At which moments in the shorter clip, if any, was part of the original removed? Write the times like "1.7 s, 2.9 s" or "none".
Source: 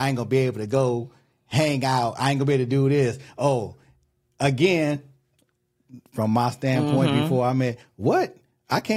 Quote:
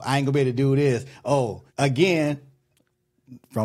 1.7 s